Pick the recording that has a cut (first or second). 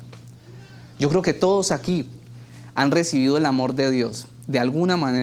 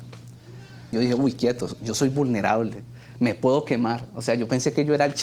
second